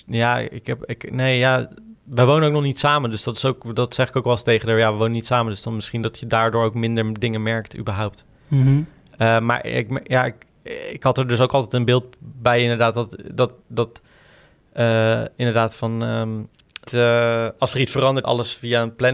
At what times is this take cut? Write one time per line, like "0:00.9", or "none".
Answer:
0:16.9
0:18.2